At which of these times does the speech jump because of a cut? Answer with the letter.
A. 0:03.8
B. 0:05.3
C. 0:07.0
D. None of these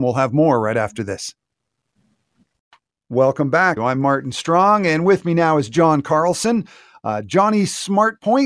A